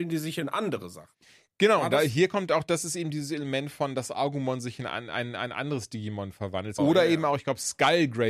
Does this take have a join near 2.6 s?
no; 1 cut; at 6.8 s

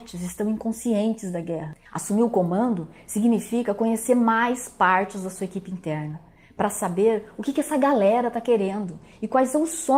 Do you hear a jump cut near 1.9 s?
yes; 1 cut; at 1.9 s

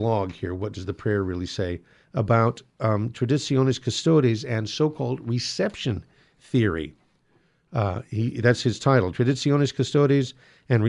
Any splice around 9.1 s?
no; 0 cuts

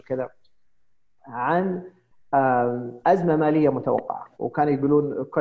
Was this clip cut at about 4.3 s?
yes; 1 cut; at 4.3 s

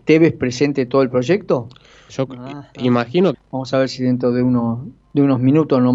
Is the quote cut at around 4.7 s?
no; 2 cuts; at 2.1 s, 3.3 s

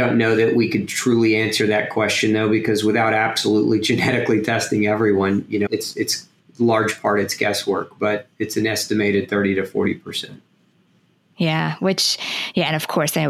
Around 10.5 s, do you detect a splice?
no; 1 cut; at 5.7 s

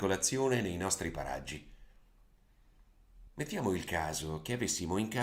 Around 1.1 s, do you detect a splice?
no; 1 cut; at 3.3 s

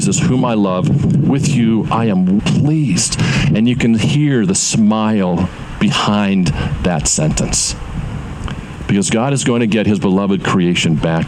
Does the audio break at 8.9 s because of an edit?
no; 1 cut; at 2.4 s

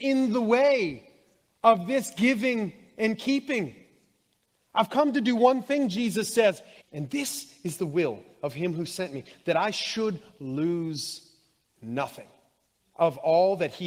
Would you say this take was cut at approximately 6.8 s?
yes; 1 cut; at 6.8 s

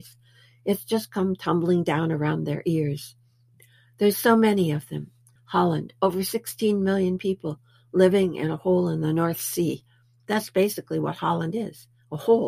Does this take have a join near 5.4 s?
yes; 1 cut; at 5.4 s

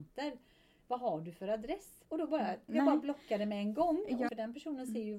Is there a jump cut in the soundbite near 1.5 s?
no; 2 cuts; at 2.7 s, 4.3 s

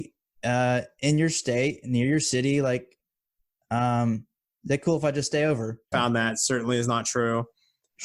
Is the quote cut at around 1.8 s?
no; 1 cut; at 5.9 s

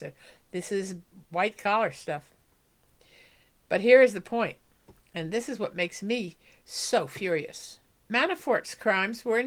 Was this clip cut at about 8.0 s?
yes; 1 cut; at 8.0 s

